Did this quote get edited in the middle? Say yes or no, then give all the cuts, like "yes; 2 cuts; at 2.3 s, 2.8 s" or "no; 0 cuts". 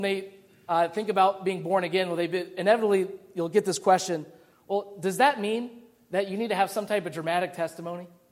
no; 0 cuts